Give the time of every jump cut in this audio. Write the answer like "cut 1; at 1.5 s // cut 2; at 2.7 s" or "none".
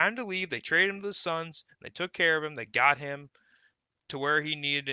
none